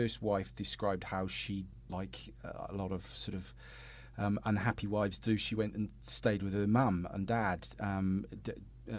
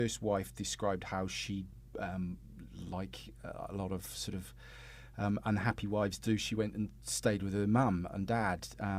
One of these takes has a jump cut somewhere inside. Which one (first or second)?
first